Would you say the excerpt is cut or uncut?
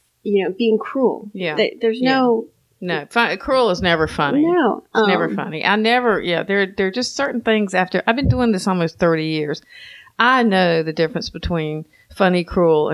uncut